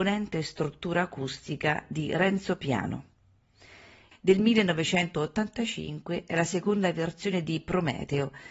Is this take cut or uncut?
cut